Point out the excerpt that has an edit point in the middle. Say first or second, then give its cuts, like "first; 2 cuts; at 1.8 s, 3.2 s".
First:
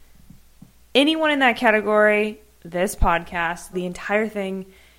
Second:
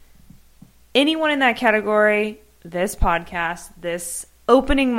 first; 1 cut; at 3.7 s